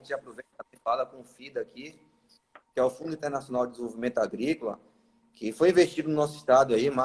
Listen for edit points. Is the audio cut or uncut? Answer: uncut